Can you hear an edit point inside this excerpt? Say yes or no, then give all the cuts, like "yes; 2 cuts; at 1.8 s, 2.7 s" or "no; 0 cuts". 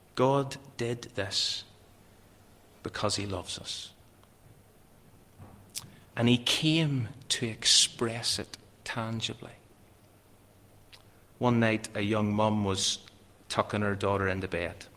yes; 1 cut; at 6.1 s